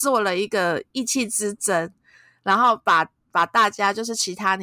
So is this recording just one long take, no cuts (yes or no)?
yes